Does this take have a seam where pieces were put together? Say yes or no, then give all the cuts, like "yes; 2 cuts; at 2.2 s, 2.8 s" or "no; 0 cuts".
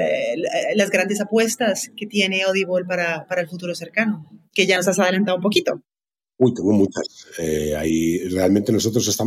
no; 0 cuts